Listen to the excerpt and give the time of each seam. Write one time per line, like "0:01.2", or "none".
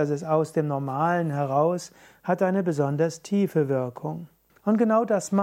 0:04.5

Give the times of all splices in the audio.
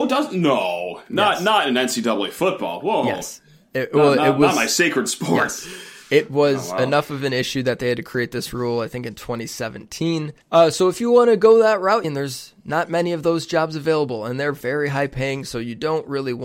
0:10.4
0:12.0

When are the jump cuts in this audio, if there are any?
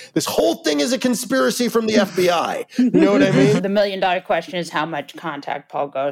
0:03.6

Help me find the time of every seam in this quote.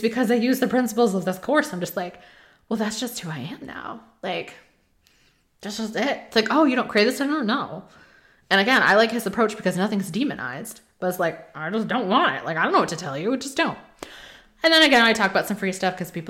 none

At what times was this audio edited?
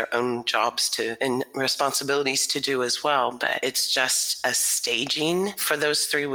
none

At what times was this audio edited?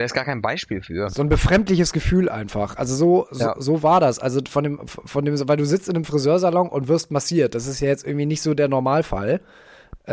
none

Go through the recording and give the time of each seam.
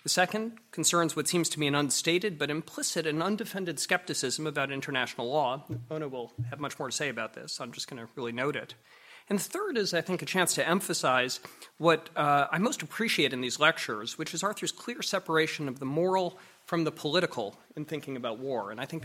none

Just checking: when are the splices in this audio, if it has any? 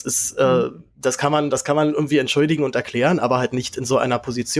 none

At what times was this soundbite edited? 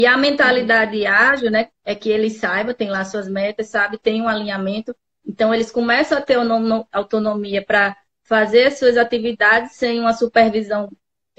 0:01.8

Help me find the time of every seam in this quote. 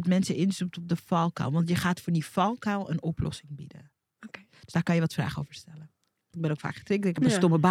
0:06.3

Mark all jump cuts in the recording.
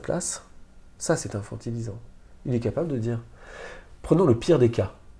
none

